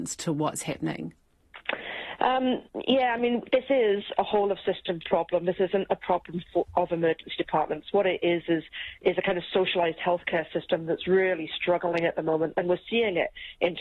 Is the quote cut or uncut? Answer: uncut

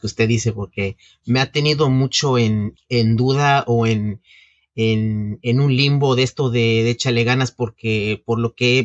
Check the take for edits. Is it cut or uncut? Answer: cut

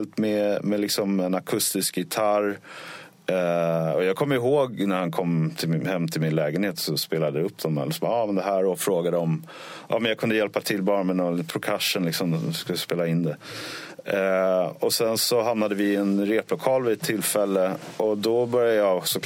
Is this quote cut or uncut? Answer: uncut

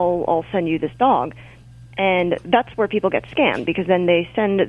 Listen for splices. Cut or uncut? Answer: uncut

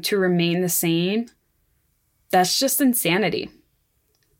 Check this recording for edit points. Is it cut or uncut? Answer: uncut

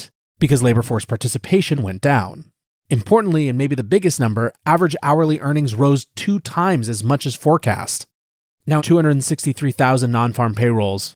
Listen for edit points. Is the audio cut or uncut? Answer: cut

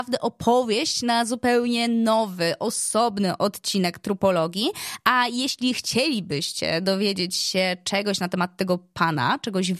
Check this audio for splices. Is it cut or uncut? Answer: uncut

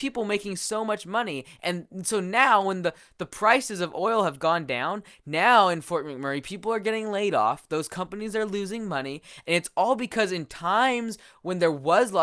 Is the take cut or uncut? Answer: uncut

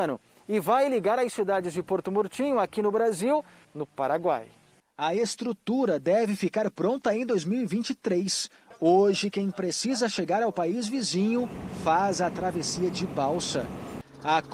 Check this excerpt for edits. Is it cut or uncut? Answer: cut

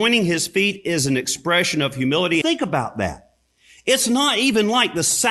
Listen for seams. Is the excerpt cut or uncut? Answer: cut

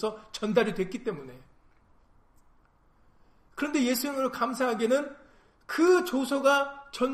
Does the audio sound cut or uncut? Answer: uncut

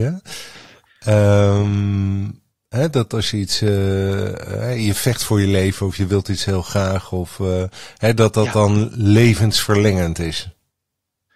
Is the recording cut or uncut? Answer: uncut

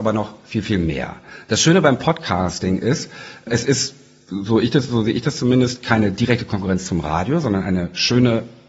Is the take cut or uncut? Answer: uncut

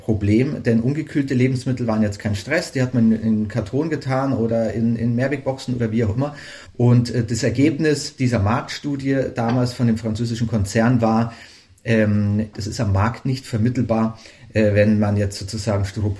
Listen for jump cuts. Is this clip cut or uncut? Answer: cut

